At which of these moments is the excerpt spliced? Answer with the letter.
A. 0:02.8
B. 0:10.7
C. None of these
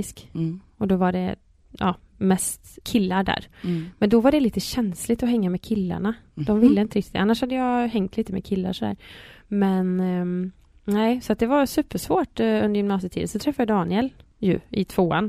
A